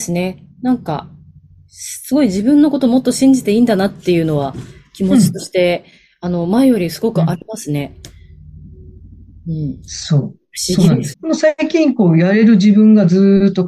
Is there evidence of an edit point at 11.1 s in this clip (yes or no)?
yes